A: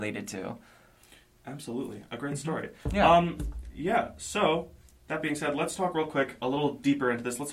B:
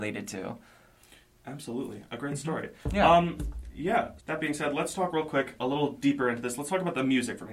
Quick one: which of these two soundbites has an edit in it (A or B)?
B